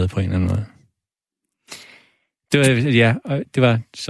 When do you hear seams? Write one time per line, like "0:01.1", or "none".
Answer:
none